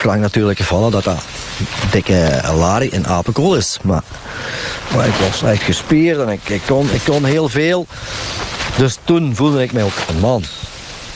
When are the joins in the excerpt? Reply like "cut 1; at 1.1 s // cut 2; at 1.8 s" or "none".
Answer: none